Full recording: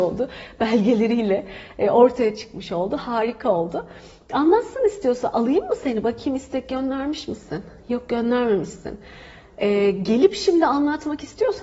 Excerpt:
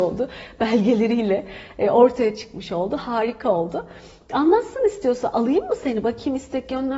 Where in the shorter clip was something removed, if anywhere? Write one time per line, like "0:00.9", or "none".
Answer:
none